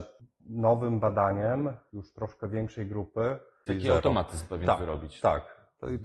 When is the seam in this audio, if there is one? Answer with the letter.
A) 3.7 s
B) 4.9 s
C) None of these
A